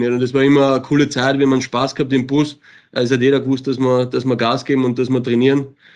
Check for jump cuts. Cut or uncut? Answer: uncut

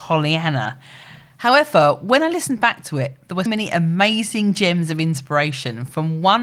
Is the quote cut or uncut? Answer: cut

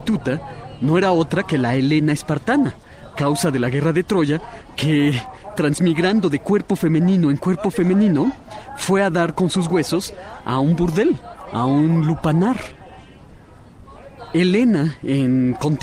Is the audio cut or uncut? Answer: cut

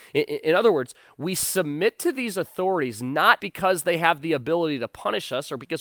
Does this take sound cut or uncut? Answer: cut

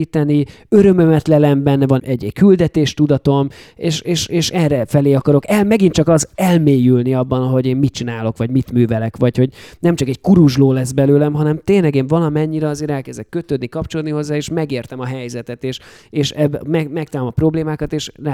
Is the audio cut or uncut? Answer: cut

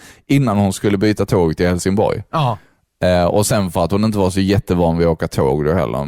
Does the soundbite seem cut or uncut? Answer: uncut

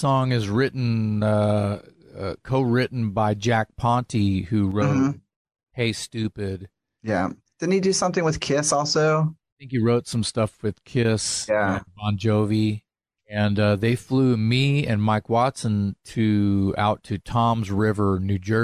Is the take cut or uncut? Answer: cut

